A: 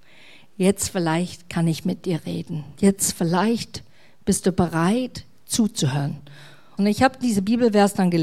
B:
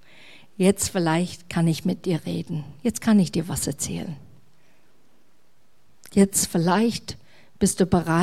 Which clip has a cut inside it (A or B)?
A